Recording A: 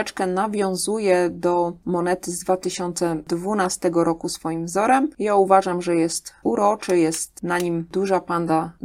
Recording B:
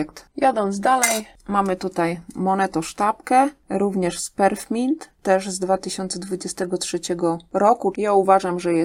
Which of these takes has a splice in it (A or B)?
B